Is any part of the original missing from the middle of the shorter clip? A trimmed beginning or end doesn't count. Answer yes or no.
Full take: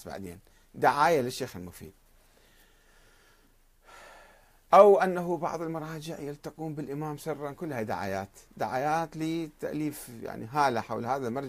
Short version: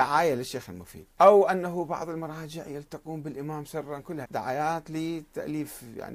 yes